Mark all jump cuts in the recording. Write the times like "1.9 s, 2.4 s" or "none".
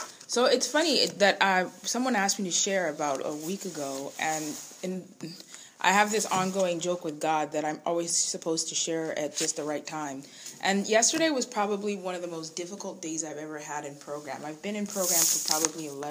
none

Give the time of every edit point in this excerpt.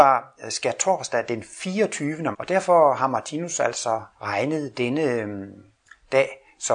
2.3 s, 4.1 s

